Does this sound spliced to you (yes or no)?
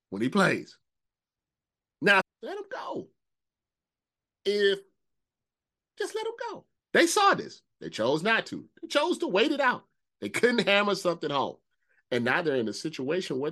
yes